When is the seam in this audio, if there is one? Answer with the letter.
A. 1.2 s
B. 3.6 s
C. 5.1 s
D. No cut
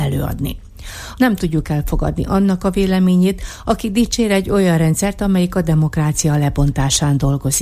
A